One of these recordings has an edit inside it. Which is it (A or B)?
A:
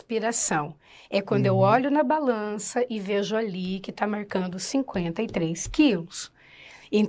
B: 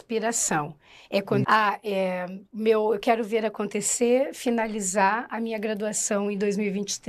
B